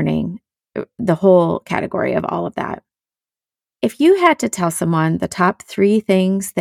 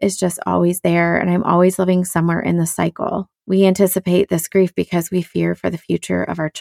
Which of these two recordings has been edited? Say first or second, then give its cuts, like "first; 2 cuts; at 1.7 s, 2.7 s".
second; 1 cut; at 3.3 s